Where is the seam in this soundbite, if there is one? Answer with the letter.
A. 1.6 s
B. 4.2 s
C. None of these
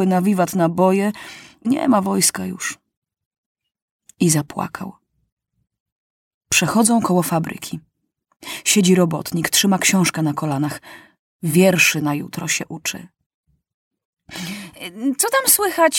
A